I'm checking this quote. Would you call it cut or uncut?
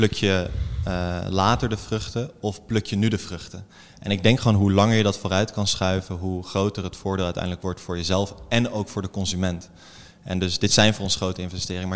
uncut